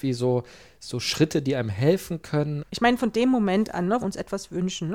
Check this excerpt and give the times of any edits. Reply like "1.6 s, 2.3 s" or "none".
2.6 s, 4.0 s